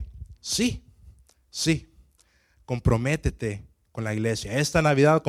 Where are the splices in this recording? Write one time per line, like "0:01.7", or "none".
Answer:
none

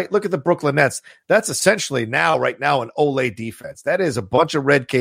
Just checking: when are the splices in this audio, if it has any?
none

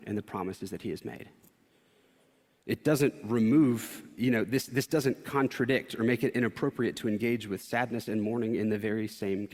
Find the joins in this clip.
none

